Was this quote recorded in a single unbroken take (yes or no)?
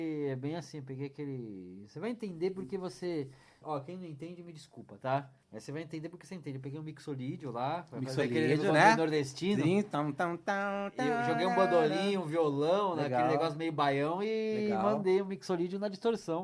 no